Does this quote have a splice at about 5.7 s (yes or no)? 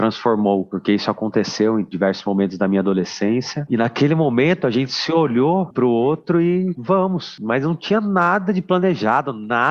yes